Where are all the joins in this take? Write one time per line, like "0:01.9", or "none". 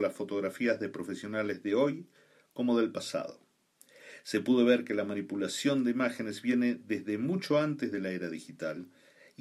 none